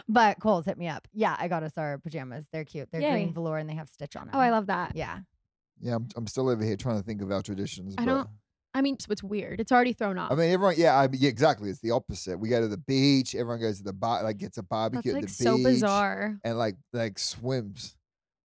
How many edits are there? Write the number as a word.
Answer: one